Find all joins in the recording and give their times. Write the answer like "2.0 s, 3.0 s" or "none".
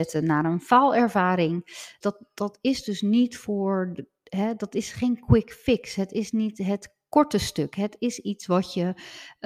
2.0 s

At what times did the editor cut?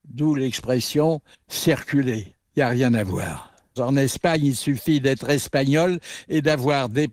3.8 s

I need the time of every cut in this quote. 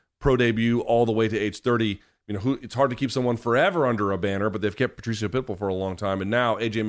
none

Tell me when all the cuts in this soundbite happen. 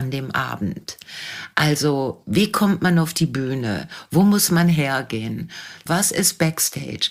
5.9 s

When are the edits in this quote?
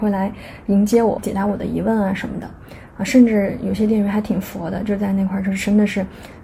1.2 s, 2.9 s

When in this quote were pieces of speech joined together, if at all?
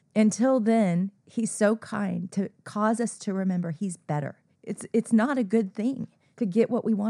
4.6 s

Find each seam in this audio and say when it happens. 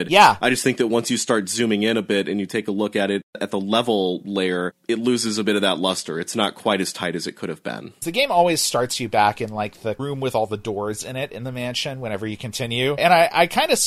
none

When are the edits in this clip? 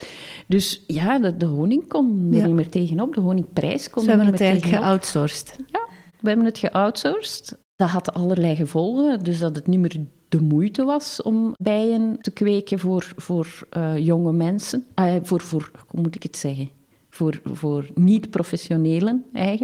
none

